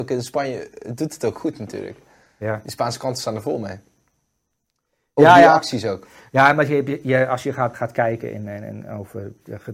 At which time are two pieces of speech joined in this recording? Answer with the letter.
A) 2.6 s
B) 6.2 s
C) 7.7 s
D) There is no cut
C